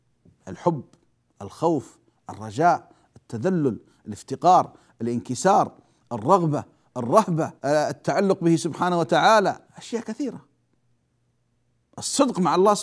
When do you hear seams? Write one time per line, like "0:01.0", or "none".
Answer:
0:07.6
0:09.7